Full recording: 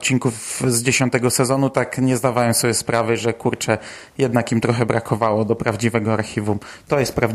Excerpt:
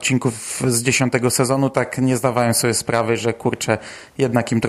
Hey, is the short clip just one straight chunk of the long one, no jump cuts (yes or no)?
yes